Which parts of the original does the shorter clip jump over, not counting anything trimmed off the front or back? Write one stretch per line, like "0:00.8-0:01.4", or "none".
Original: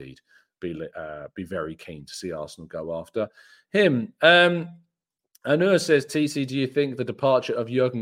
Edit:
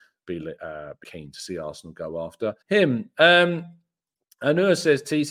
0:01.4-0:01.8
0:03.3-0:03.6